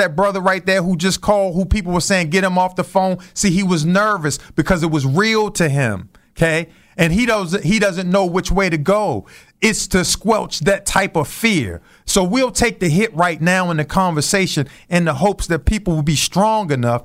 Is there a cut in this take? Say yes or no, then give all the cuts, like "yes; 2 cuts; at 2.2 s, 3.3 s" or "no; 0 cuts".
no; 0 cuts